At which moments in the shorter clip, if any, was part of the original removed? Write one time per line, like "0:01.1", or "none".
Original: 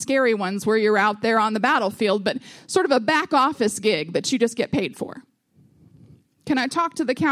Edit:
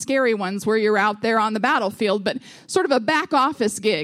none